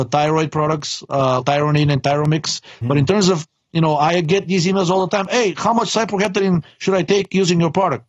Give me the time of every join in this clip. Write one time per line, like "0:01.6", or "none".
0:01.4
0:02.8